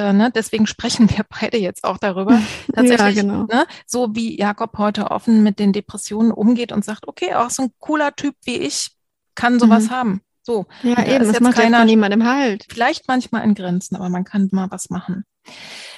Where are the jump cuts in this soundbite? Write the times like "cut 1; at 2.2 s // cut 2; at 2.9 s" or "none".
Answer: cut 1; at 12.7 s // cut 2; at 14.5 s